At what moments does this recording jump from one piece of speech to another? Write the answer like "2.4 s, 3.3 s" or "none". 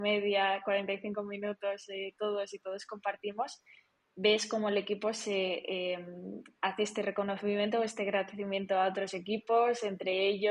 none